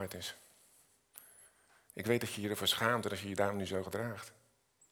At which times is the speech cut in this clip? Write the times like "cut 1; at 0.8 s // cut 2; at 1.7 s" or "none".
none